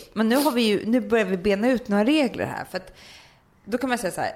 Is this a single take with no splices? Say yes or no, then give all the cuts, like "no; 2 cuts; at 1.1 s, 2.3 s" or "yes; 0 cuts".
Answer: yes; 0 cuts